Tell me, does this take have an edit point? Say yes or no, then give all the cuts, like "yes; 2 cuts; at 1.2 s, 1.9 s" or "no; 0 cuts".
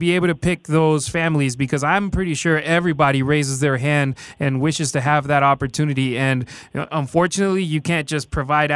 no; 0 cuts